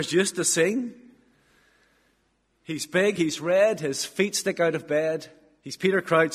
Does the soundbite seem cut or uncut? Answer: uncut